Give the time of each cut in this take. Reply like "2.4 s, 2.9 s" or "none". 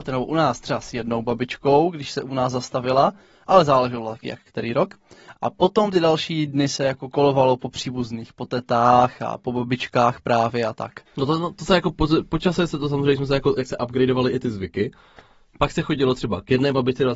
11.1 s, 13.6 s